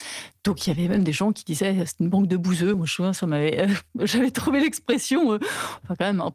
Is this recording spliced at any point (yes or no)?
no